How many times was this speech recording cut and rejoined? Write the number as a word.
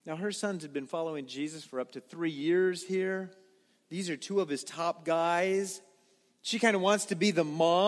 zero